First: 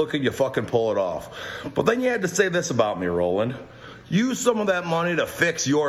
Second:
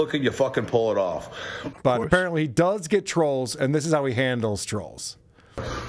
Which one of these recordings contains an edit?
second; 1 cut; at 1.7 s

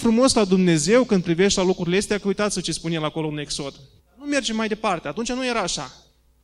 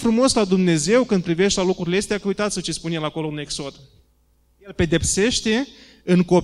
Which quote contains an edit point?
first; 1 cut; at 4.0 s

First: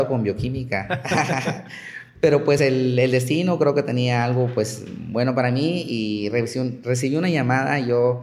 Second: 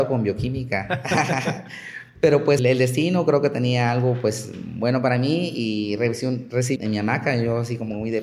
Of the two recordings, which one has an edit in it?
second; 2 cuts; at 2.6 s, 6.8 s

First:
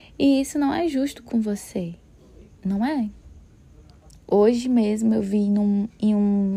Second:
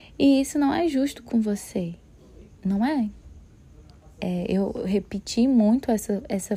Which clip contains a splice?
first; 1 cut; at 4.1 s

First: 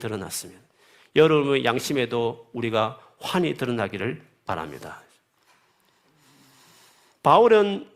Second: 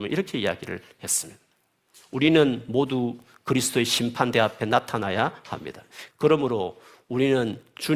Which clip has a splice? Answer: second; 1 cut; at 6.1 s

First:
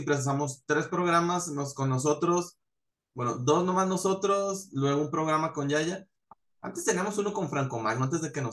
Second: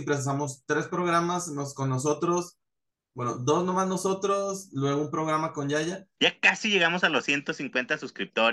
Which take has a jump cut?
second; 1 cut; at 6.2 s

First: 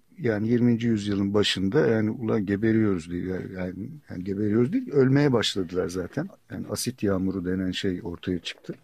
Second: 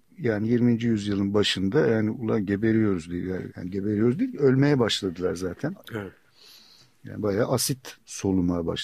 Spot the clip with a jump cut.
second; 2 cuts; at 3.5 s, 5.8 s

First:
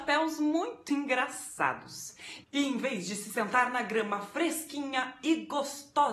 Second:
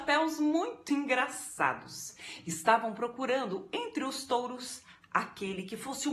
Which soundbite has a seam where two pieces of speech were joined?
first; 1 cut; at 2.4 s

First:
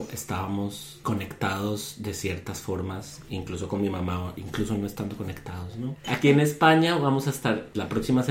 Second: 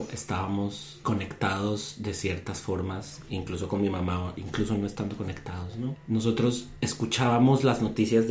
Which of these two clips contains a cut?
first; 1 cut; at 6.0 s

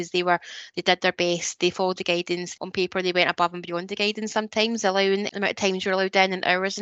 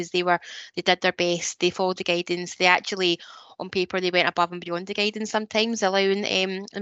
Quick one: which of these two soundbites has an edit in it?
first; 2 cuts; at 2.6 s, 5.3 s

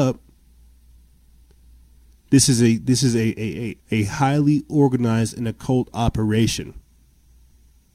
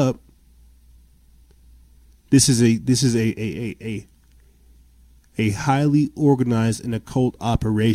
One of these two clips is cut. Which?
first; 1 cut; at 3.8 s

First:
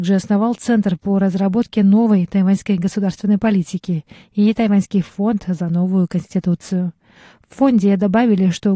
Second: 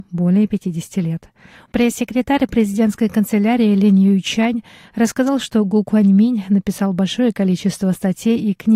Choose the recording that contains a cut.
second; 1 cut; at 1.7 s

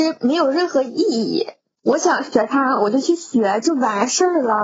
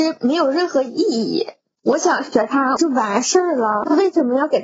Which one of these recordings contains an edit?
second; 1 cut; at 2.8 s

